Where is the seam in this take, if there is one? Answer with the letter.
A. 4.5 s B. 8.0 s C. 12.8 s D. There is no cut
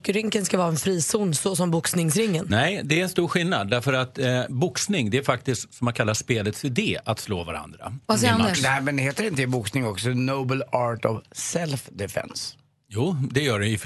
B